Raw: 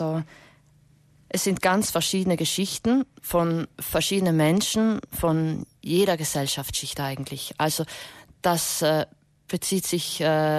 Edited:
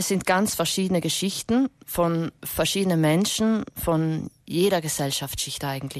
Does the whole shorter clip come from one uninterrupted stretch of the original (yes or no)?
yes